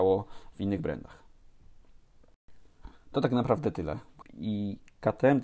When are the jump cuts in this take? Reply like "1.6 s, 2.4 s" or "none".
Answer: 4.2 s